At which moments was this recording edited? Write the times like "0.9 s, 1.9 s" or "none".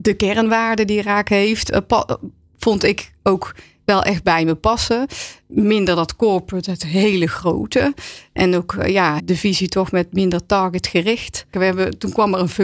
9.2 s, 11.5 s